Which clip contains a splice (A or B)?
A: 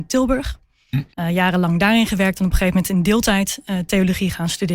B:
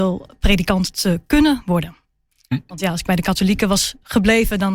A